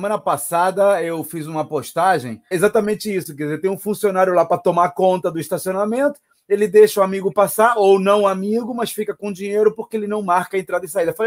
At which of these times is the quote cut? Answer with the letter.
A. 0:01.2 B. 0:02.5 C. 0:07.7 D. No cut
B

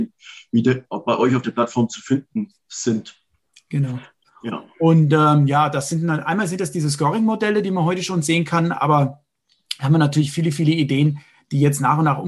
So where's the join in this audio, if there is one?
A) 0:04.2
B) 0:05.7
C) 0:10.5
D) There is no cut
A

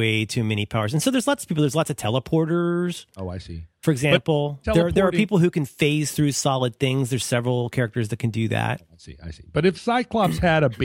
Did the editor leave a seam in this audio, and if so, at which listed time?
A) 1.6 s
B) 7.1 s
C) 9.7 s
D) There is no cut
C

